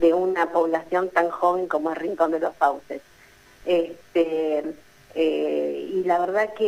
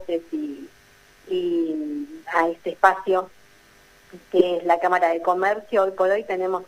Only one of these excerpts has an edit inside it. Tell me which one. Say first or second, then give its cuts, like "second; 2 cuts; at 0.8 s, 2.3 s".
first; 1 cut; at 3.6 s